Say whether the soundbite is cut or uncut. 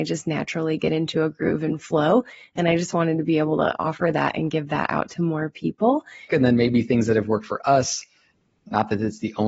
cut